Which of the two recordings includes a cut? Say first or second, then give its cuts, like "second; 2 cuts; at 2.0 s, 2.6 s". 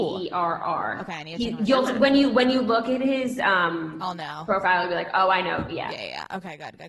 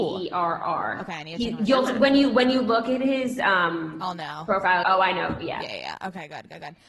second; 1 cut; at 4.8 s